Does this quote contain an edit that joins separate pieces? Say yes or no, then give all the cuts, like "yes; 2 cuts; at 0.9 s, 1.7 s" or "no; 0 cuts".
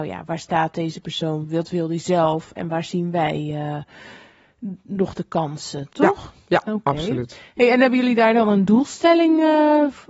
no; 0 cuts